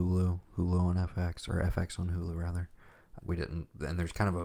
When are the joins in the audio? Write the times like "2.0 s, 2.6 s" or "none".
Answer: 3.2 s